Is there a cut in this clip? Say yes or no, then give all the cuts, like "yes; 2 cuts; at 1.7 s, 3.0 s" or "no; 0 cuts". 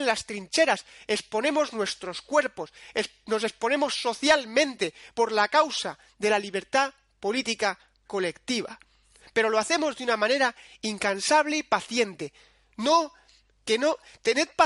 no; 0 cuts